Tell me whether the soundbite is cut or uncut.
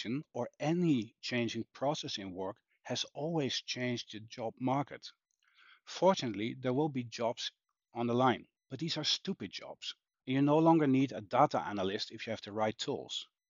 cut